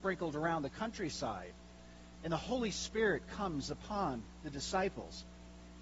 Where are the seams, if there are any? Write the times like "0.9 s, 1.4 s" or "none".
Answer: 2.2 s